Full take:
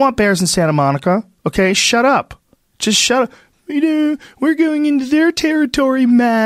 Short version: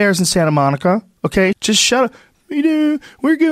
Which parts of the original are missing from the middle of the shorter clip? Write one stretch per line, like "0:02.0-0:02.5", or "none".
0:01.7-0:02.7

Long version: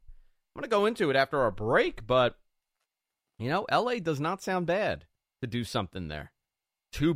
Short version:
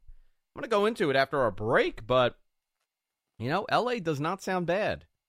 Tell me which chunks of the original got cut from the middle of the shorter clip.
none

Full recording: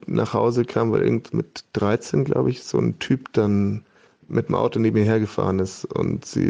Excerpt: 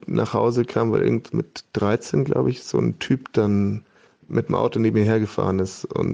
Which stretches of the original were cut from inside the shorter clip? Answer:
none

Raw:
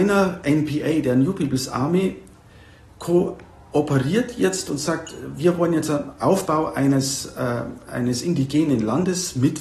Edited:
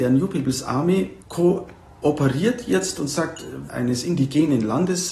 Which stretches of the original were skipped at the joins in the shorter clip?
0:02.3-0:02.9
0:05.4-0:07.8

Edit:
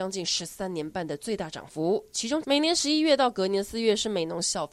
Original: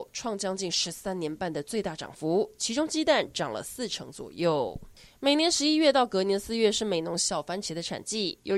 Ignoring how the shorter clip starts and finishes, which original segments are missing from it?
0:02.9-0:05.2

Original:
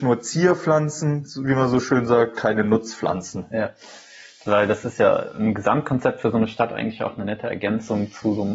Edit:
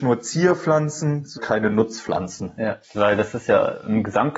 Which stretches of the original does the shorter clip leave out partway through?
0:01.4-0:02.3
0:03.8-0:04.3

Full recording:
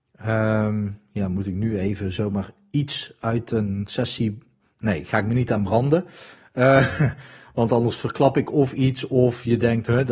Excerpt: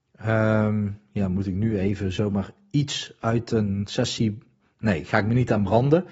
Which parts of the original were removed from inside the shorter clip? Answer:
none

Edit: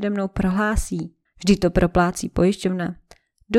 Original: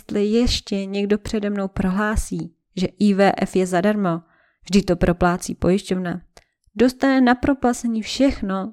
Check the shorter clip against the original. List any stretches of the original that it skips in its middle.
0:02.7-0:04.5

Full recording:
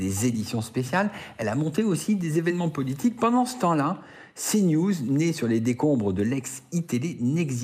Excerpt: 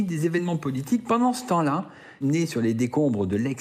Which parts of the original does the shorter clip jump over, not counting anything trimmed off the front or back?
0:04.3-0:05.1

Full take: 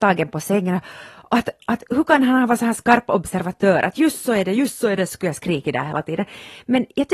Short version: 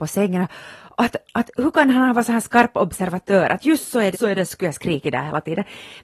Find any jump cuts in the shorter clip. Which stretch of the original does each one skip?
0:04.5-0:04.7

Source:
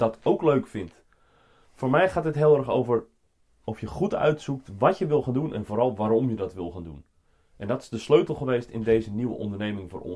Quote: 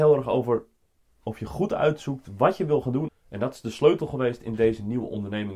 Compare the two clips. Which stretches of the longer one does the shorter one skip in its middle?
0:05.5-0:07.4

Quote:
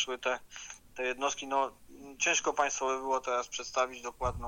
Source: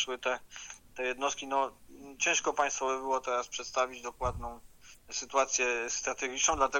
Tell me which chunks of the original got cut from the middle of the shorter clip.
none

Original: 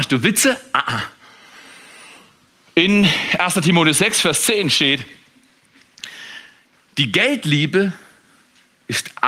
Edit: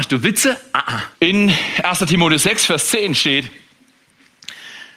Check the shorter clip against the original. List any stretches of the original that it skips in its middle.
0:01.2-0:02.7

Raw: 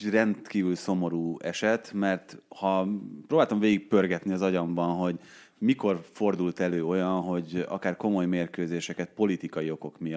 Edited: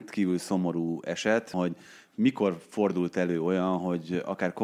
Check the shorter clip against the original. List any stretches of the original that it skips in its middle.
0:01.9-0:05.0

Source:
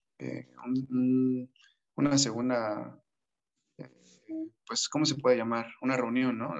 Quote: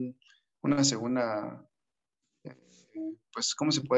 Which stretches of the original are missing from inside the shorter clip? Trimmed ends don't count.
none

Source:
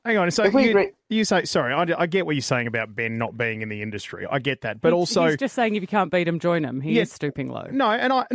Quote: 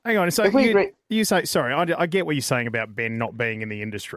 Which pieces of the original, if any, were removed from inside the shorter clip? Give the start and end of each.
none

